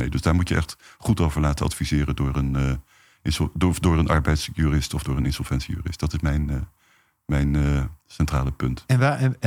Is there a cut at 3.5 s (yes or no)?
no